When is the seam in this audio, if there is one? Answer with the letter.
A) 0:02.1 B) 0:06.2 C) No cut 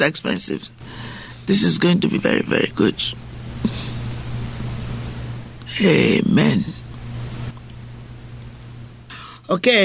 A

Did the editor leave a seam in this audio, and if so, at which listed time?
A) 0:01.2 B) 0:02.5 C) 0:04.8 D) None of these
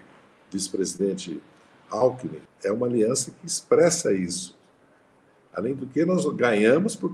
B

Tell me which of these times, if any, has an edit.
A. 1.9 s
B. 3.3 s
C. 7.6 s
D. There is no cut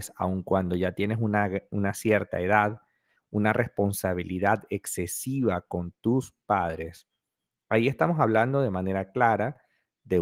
D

